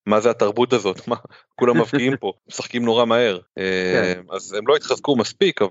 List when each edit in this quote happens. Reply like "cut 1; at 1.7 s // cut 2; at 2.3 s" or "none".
cut 1; at 2.4 s // cut 2; at 3.5 s